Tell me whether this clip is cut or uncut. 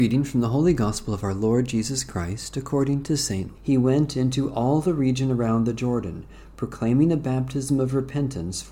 cut